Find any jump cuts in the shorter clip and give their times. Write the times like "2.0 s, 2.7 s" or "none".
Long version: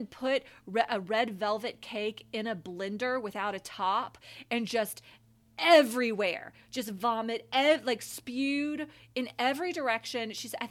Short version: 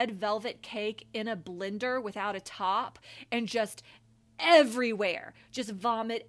none